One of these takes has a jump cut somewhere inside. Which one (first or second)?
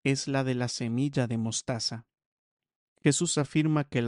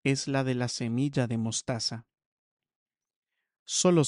first